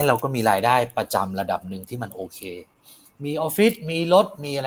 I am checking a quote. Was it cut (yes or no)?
no